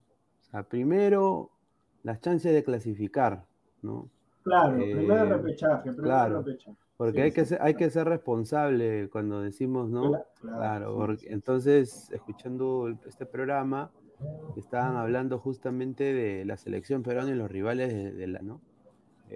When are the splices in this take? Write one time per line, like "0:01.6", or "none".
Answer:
0:10.4
0:12.1
0:18.4